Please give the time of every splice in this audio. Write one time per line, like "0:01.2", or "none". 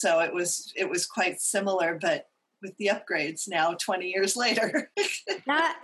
none